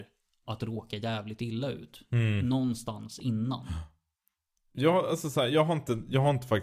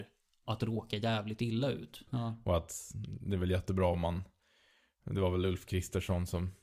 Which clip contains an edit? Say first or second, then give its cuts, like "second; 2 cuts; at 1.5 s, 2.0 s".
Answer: second; 1 cut; at 2.1 s